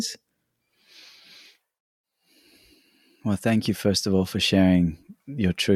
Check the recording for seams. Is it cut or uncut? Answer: uncut